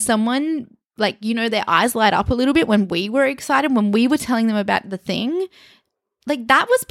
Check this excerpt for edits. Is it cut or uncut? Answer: uncut